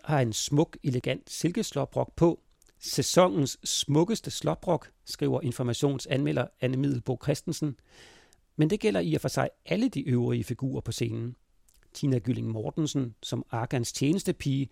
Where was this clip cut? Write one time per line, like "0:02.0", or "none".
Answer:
none